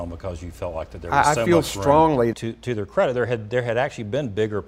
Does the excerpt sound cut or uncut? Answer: cut